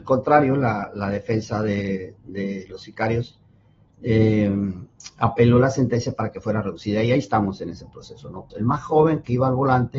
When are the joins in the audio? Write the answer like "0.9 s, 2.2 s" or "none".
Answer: 8.5 s